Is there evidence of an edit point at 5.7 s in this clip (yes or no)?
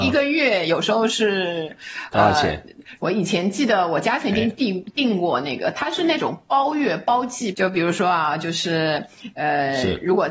no